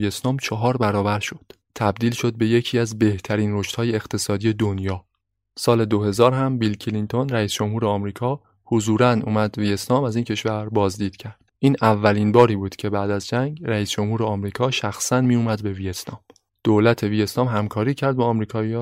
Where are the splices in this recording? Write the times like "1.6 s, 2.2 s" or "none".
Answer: none